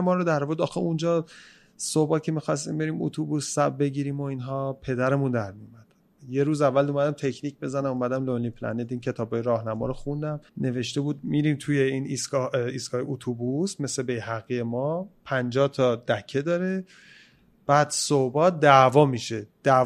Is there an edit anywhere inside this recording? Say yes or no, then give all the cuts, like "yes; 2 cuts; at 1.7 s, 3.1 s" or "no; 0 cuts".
yes; 1 cut; at 10.5 s